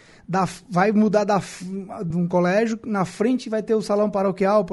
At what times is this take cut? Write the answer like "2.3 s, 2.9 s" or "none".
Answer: 2.1 s